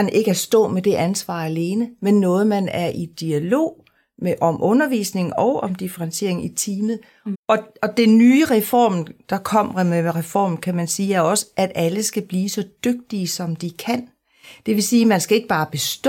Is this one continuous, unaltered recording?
no; 1 cut; at 7.3 s

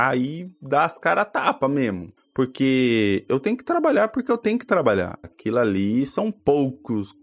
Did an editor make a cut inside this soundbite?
yes; 2 cuts; at 2.2 s, 5.2 s

